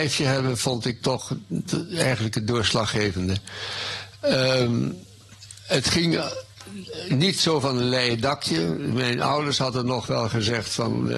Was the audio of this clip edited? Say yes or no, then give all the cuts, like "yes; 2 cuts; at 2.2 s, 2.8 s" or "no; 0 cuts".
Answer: yes; 1 cut; at 1.0 s